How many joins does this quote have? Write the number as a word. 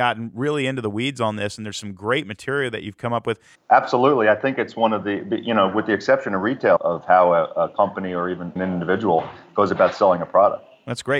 three